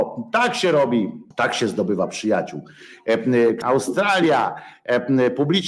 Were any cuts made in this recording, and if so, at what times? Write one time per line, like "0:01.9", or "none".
0:01.3
0:03.6